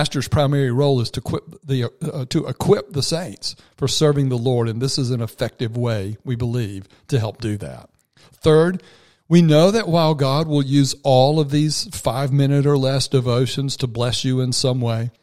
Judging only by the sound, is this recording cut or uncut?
uncut